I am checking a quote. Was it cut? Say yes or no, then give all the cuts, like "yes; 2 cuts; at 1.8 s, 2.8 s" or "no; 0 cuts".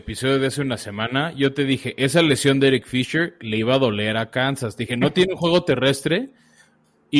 no; 0 cuts